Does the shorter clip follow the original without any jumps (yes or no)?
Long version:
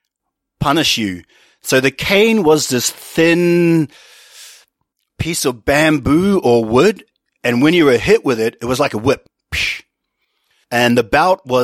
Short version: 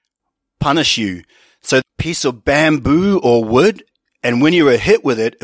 no